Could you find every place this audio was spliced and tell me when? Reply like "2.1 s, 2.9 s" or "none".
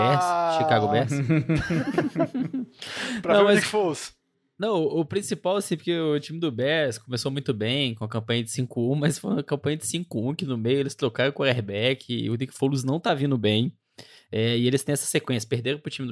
none